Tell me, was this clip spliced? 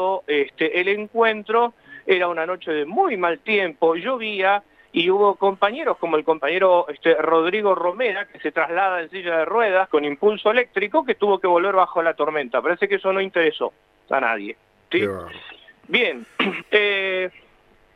yes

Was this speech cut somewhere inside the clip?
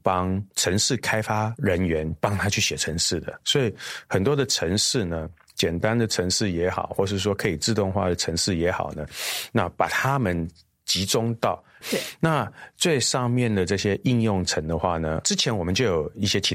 yes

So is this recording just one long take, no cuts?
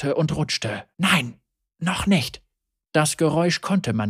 no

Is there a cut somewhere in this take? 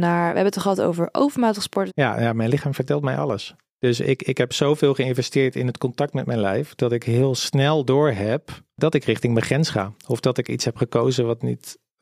yes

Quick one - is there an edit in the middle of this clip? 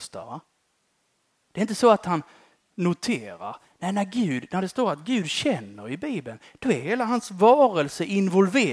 no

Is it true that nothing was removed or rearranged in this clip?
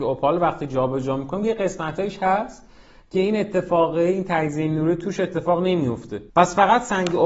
no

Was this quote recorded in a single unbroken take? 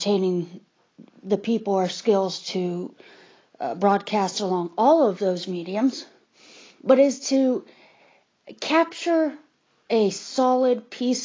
yes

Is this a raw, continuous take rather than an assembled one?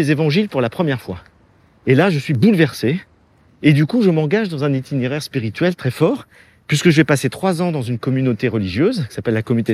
no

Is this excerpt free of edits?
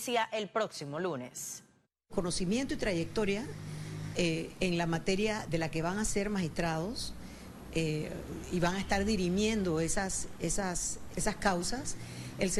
no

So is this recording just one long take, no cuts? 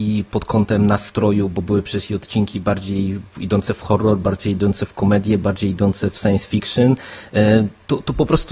yes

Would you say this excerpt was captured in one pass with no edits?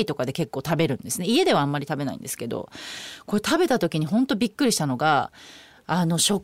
yes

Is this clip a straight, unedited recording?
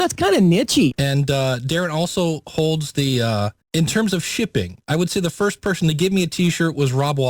no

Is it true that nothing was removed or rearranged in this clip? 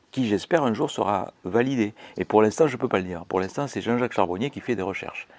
no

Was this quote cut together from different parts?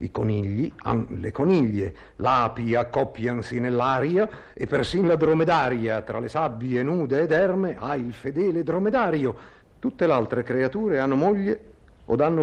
yes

